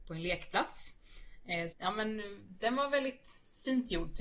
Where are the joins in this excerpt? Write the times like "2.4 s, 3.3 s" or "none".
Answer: 1.7 s